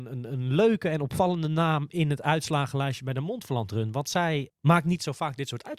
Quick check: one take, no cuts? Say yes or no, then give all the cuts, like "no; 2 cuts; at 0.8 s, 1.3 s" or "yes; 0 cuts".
no; 1 cut; at 4.5 s